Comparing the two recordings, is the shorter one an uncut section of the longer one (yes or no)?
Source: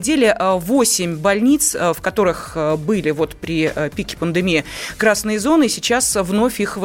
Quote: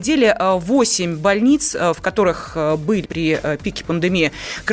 no